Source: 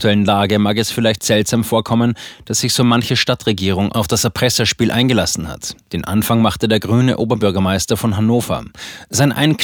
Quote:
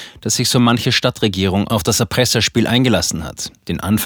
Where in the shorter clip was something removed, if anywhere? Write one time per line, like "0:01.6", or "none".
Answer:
none